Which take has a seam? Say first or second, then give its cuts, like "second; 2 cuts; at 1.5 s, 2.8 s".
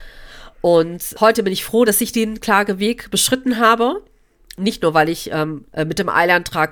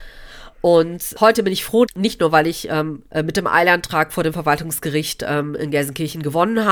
second; 1 cut; at 1.9 s